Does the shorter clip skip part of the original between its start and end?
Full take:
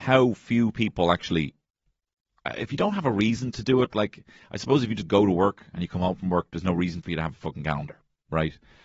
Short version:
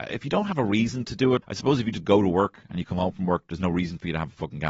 yes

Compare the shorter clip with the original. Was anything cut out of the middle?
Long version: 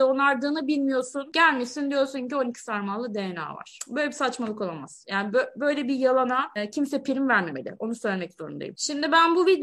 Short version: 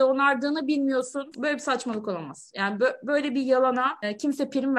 yes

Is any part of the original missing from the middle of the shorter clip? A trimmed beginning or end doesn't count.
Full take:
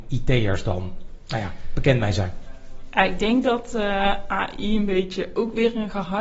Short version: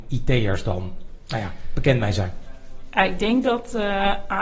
no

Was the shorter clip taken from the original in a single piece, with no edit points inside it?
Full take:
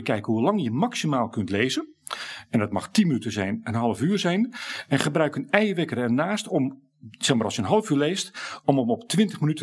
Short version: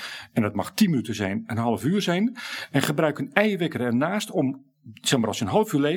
yes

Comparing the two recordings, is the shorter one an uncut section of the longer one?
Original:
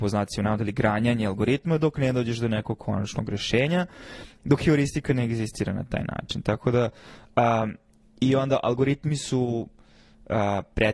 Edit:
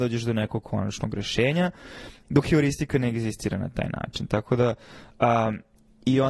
yes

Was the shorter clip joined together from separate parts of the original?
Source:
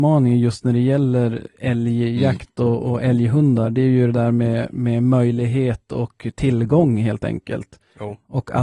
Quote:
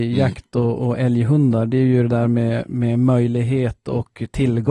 no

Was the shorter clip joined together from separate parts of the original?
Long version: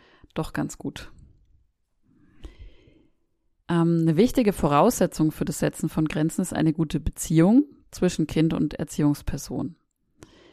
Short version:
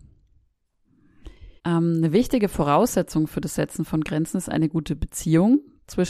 yes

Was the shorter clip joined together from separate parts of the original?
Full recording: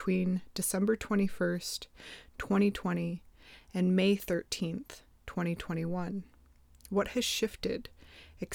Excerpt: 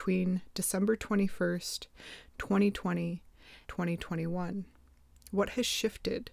yes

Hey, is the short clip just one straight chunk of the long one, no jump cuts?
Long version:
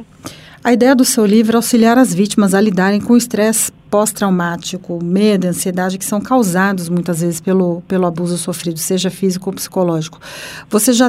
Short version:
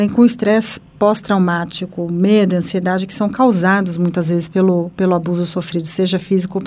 yes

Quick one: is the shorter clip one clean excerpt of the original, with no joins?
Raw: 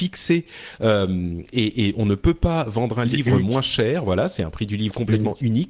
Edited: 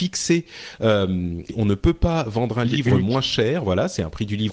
no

